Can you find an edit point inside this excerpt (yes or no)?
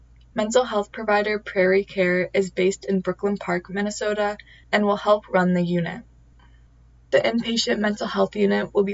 no